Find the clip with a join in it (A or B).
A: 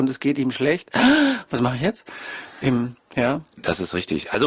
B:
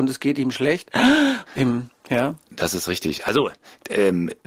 B